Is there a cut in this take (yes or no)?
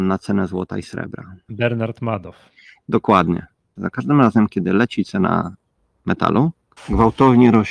yes